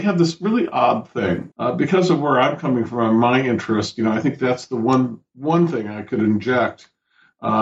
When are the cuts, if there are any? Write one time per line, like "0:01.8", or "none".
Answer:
0:01.5